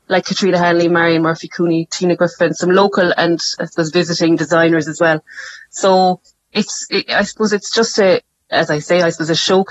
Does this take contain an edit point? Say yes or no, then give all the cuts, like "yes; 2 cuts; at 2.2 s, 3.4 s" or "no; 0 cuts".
no; 0 cuts